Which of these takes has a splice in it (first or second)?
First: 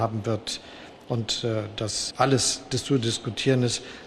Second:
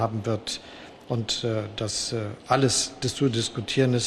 first